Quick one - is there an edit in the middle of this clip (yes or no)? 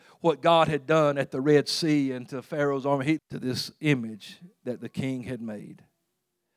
yes